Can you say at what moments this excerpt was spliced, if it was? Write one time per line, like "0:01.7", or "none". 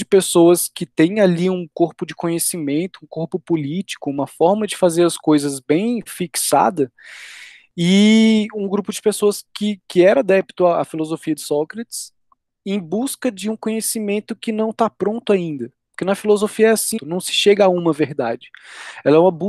0:17.0